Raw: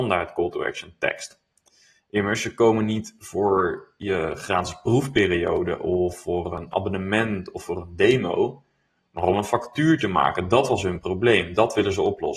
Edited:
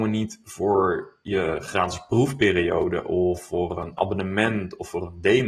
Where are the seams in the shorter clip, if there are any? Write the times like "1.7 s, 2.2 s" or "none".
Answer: none